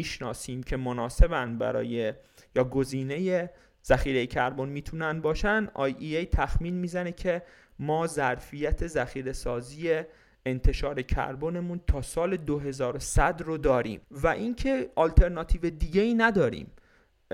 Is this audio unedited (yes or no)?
no